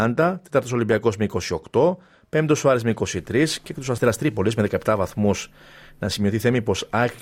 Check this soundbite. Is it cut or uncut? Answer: uncut